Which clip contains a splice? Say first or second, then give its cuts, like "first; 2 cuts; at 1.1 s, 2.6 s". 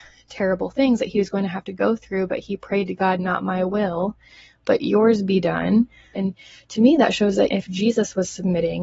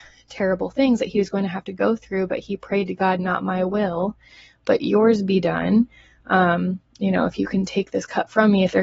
first; 2 cuts; at 6.1 s, 7.5 s